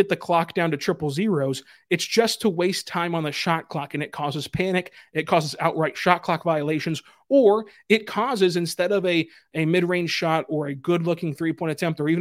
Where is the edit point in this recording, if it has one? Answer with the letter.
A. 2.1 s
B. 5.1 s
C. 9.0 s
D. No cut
D